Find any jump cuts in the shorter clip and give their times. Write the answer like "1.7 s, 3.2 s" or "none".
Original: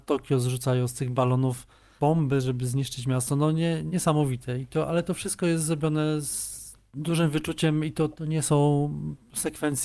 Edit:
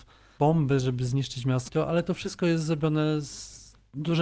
1.7 s